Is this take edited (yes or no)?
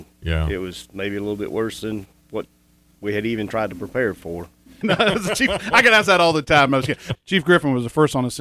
yes